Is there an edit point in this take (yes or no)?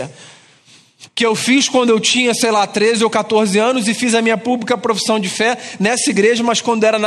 yes